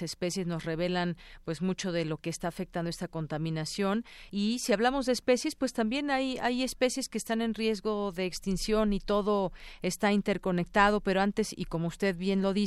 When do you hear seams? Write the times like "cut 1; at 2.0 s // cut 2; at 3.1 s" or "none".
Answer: none

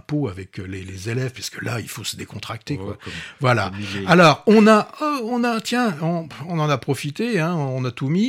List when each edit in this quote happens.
none

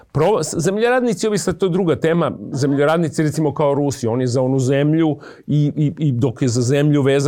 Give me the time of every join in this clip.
none

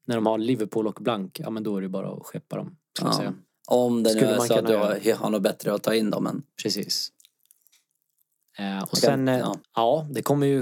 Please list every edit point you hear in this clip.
cut 1; at 3.5 s // cut 2; at 9.6 s

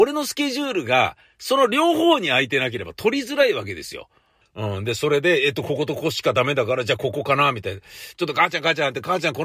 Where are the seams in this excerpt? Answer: cut 1; at 4.4 s

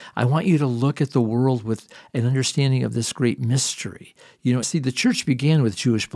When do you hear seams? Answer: cut 1; at 4.6 s

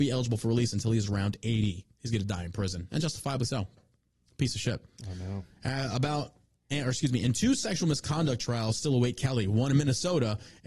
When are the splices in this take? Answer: none

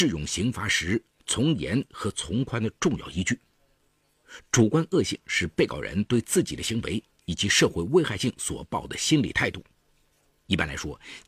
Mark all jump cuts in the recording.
none

